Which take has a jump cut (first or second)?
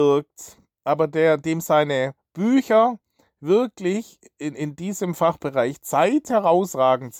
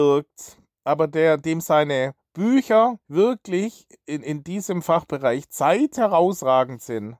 second